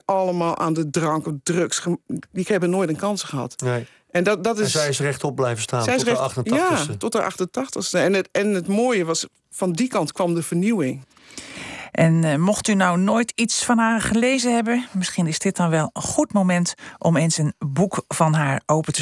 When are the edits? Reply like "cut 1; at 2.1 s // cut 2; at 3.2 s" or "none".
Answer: none